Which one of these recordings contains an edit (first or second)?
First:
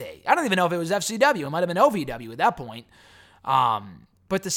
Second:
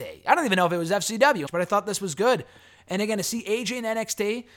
second